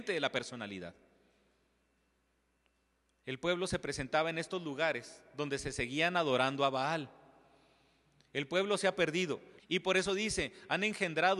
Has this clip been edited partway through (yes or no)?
yes